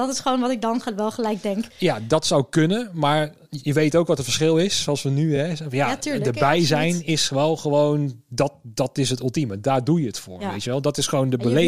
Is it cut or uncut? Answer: uncut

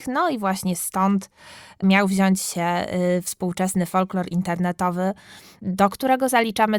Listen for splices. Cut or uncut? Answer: uncut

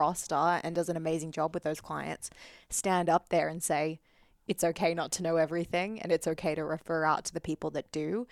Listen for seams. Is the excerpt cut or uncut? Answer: uncut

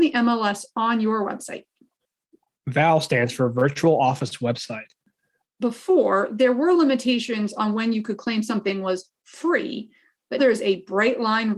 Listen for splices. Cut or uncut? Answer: cut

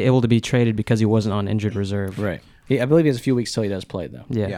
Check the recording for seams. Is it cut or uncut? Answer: cut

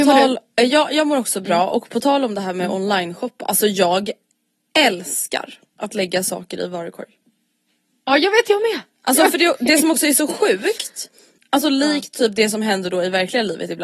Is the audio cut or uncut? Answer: uncut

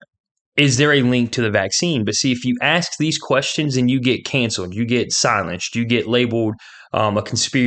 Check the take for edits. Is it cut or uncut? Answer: uncut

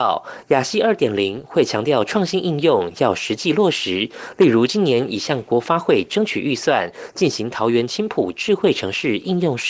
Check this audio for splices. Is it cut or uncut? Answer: uncut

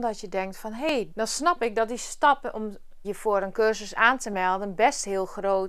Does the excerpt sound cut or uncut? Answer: cut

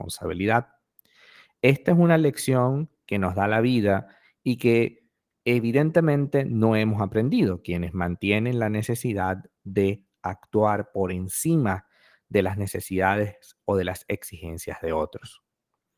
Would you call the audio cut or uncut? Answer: uncut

